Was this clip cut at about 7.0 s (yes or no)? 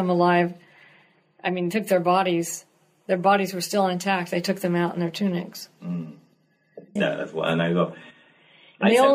yes